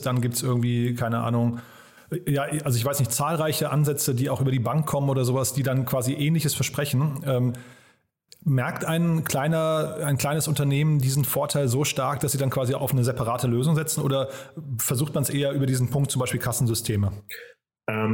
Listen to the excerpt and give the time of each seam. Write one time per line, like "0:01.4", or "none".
none

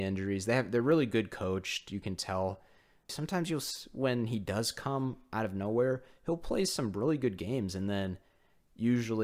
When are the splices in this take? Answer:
0:03.1

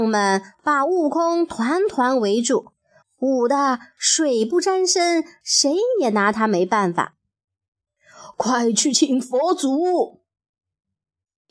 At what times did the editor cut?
0:03.0

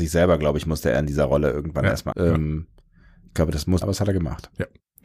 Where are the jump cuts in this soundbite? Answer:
0:02.1
0:03.8

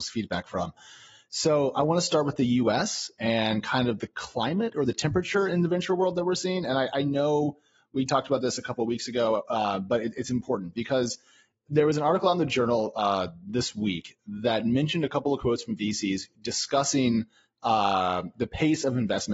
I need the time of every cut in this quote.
none

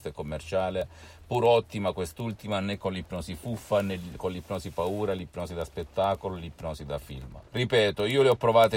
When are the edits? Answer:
0:07.5

